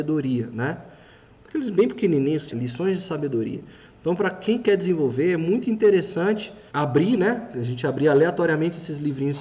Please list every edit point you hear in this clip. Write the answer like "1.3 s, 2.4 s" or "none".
2.5 s, 6.7 s